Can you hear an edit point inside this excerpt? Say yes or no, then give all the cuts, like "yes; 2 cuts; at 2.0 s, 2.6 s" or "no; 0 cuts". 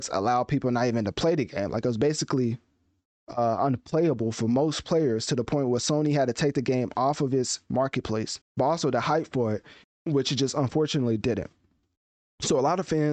yes; 2 cuts; at 8.4 s, 9.8 s